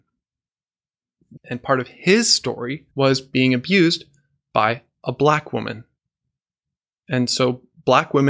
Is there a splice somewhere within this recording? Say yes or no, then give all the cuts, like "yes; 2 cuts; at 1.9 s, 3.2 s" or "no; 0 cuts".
yes; 2 cuts; at 1.4 s, 2.9 s